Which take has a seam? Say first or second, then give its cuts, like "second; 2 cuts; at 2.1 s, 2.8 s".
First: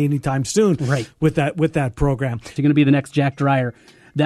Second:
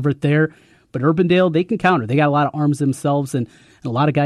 first; 1 cut; at 2.6 s